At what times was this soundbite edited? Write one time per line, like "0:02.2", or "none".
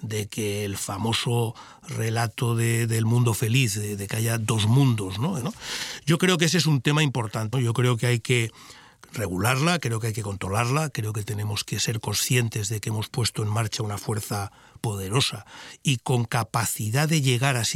0:05.4
0:07.5
0:14.8